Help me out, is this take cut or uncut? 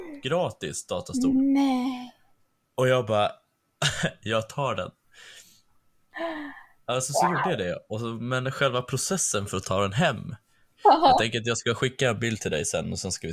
cut